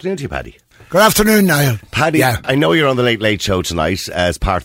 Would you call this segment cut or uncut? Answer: cut